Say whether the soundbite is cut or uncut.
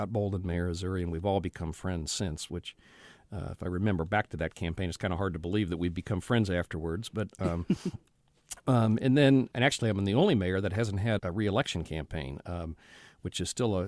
cut